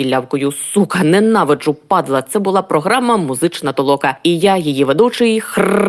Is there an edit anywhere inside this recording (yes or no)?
no